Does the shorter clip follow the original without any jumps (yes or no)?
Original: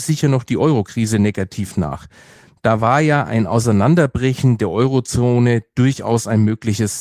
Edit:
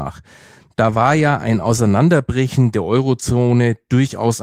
yes